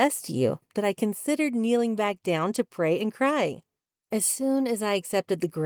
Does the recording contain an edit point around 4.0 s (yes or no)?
yes